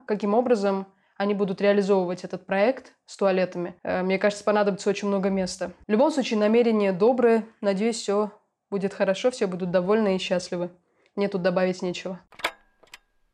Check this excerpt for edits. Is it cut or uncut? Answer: uncut